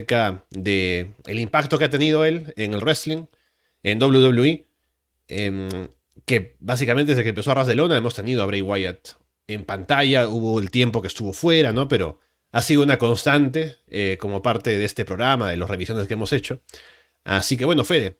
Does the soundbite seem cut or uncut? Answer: uncut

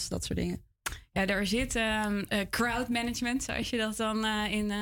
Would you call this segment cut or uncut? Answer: uncut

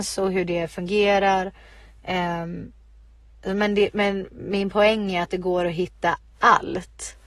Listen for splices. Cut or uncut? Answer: uncut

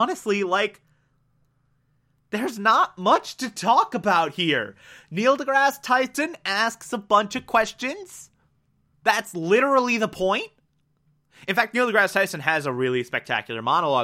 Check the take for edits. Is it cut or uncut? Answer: cut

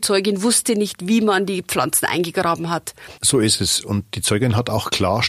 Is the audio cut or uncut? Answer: cut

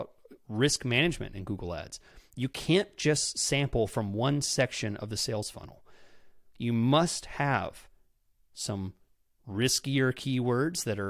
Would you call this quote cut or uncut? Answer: uncut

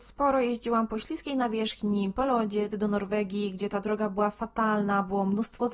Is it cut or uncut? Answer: cut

